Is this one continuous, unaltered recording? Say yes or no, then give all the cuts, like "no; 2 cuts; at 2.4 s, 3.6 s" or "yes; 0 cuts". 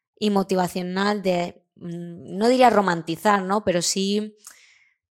yes; 0 cuts